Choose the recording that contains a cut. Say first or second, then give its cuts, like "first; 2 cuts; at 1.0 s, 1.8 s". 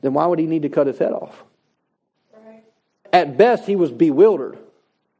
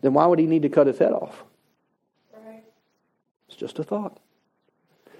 first; 1 cut; at 3.1 s